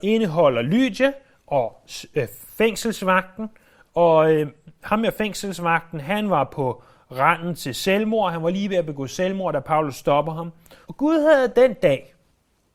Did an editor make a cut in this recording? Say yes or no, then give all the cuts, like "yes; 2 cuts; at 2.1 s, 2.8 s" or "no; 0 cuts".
yes; 1 cut; at 10.8 s